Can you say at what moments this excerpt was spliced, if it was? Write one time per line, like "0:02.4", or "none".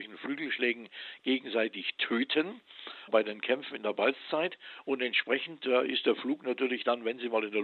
none